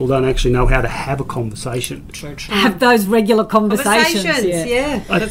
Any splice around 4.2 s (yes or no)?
no